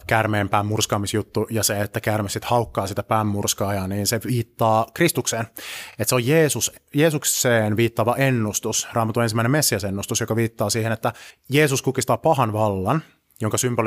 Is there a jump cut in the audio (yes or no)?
no